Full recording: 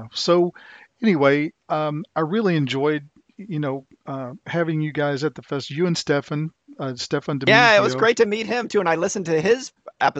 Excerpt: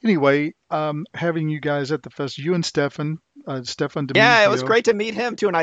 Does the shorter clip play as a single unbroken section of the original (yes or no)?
no